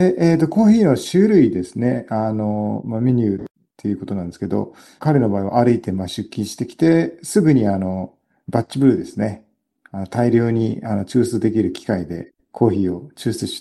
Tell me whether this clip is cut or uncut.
cut